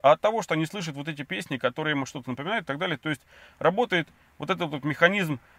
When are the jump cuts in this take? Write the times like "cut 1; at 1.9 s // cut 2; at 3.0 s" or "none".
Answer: none

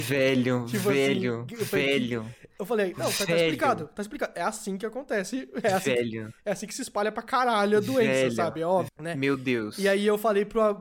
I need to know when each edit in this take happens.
cut 1; at 8.9 s

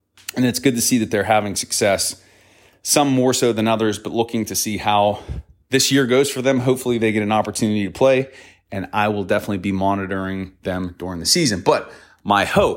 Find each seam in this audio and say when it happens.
none

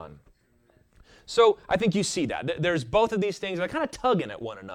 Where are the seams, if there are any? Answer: none

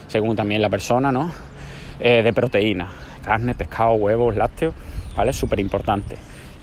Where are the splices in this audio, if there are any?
none

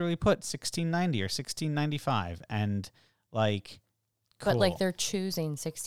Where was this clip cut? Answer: none

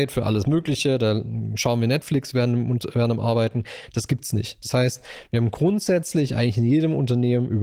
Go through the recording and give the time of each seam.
none

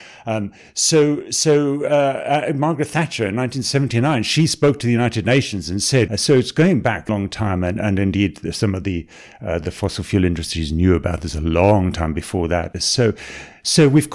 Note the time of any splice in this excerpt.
cut 1; at 6.1 s // cut 2; at 7.1 s

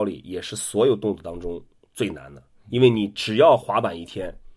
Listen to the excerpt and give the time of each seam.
none

